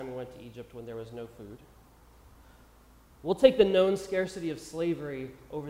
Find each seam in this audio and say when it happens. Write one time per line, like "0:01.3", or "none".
none

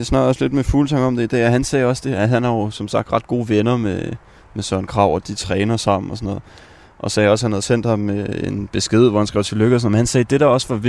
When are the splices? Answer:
none

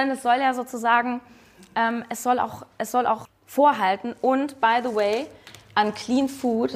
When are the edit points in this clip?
0:03.2

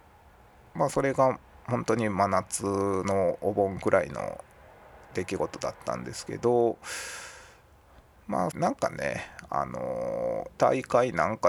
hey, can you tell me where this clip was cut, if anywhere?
0:08.5
0:10.5

